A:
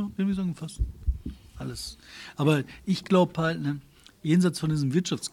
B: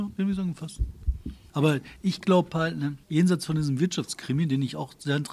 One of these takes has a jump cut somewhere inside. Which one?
B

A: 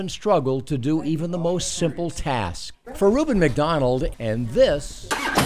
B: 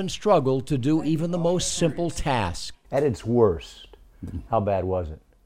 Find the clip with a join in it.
A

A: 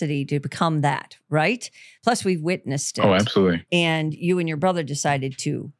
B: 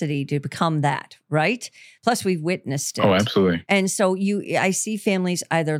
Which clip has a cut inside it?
A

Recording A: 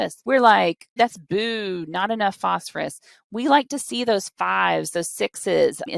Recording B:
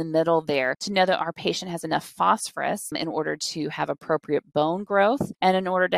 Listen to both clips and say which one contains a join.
A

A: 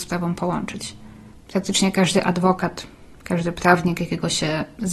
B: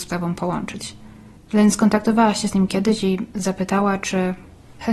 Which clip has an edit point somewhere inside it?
A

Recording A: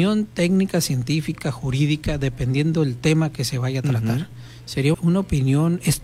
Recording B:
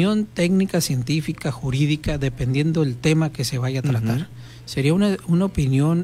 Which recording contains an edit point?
A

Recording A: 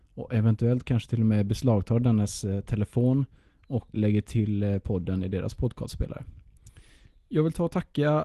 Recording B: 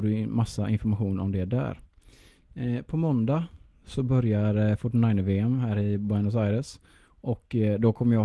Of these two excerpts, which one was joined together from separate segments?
A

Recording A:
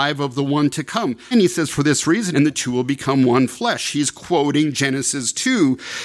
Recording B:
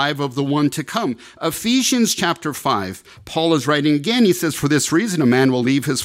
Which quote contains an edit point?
A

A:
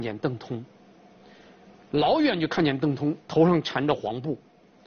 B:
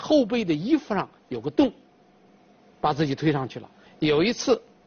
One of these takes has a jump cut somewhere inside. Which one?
B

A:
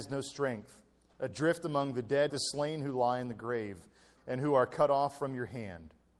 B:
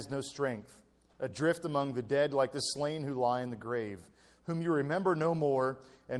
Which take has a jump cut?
A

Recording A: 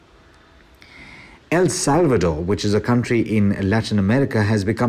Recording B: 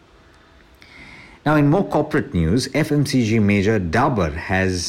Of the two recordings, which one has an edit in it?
A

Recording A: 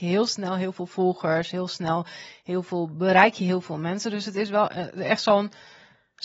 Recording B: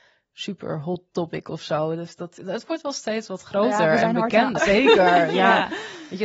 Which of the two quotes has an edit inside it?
B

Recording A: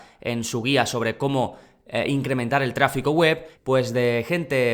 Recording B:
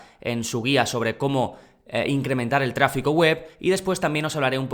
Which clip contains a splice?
A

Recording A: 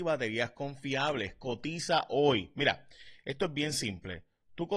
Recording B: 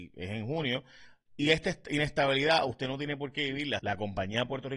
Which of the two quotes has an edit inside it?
B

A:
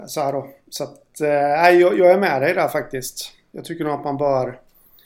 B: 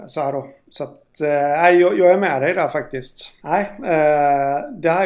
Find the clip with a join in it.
B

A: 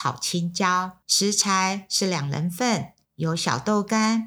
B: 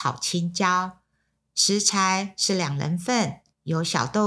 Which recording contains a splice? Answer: A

